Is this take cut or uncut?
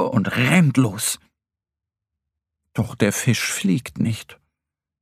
uncut